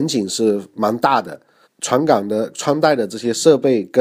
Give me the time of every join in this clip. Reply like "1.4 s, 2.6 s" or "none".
1.6 s